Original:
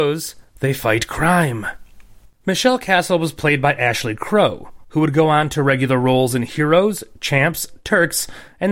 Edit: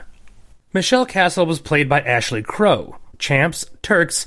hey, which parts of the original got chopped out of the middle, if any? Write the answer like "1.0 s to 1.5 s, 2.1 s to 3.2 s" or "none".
4.9 s to 7.1 s